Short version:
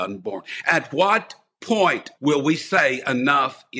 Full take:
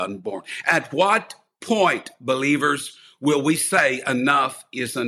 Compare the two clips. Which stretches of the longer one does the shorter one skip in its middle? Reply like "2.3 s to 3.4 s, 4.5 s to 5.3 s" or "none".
2.2 s to 3.2 s